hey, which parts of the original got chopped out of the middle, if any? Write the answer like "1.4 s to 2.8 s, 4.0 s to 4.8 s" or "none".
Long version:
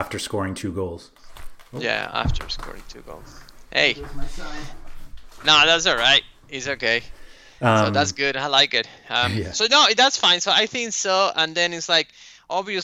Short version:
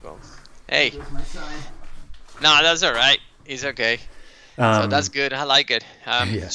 none